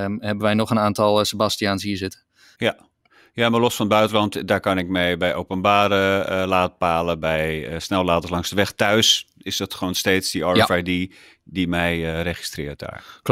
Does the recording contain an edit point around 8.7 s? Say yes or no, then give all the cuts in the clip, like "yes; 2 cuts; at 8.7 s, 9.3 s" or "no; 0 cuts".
no; 1 cut; at 2.6 s